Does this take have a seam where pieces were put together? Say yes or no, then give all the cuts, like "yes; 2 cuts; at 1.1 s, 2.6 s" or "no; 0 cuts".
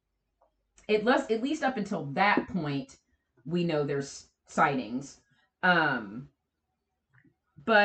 no; 0 cuts